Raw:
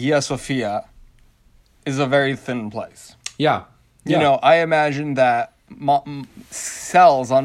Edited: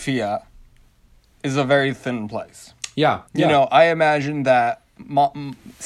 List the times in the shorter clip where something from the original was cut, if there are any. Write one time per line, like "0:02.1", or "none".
0:03.3

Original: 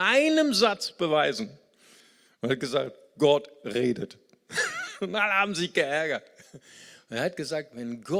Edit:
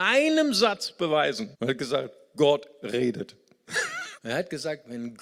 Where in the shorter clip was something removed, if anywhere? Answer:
0:01.5
0:04.2

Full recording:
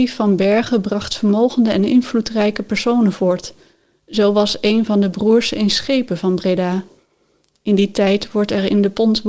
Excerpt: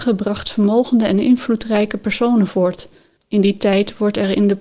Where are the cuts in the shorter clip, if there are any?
0:03.2

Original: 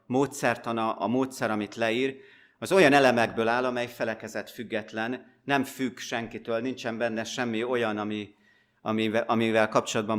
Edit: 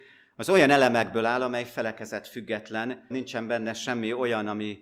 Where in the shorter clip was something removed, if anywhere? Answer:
0:03.1

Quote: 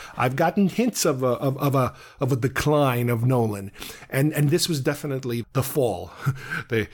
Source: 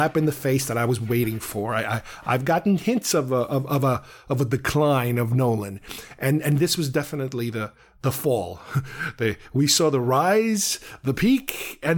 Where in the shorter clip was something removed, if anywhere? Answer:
0:05.4

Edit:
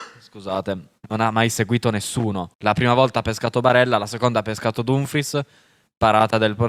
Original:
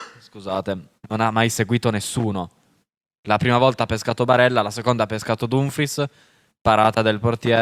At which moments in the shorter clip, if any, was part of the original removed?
0:02.5

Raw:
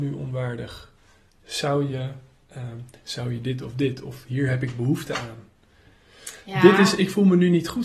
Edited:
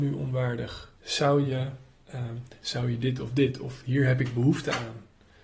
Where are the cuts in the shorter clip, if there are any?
0:00.9

